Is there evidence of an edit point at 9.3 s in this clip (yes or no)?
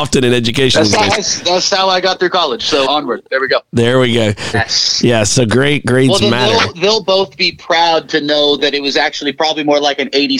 no